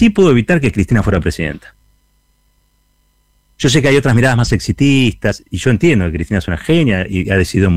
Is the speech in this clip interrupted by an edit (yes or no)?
no